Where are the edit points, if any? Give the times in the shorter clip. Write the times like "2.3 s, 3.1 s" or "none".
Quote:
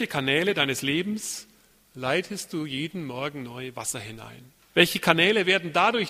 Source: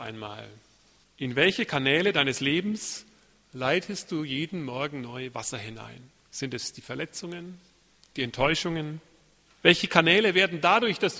4.6 s